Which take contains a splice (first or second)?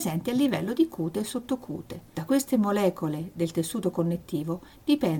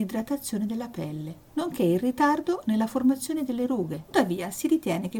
second